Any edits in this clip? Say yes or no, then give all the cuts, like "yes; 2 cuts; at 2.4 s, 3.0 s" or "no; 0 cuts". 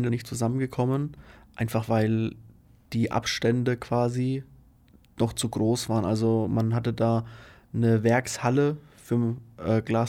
no; 0 cuts